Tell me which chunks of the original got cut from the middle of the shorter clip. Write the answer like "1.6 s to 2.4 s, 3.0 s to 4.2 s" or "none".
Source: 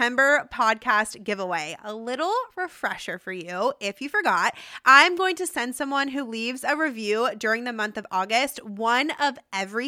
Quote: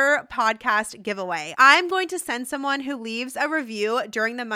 1.8 s to 4.8 s